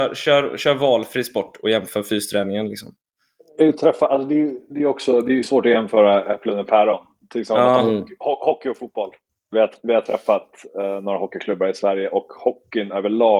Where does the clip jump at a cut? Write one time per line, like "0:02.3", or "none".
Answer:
0:09.5